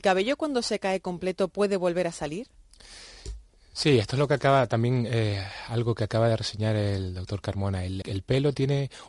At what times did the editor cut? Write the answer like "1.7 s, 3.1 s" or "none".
8.0 s